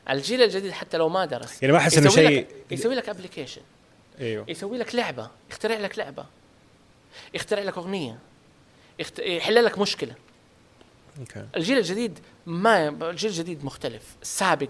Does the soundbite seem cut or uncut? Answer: uncut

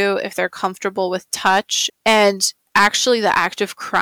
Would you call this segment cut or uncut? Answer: cut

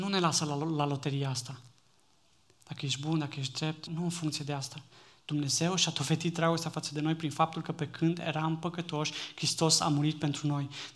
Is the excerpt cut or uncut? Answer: cut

